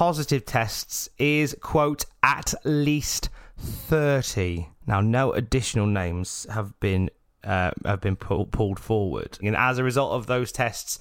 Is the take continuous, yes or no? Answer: no